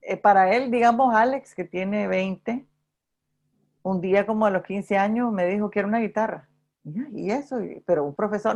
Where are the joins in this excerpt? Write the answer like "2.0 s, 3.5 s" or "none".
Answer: none